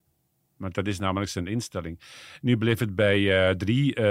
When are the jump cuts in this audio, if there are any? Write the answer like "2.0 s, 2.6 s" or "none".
none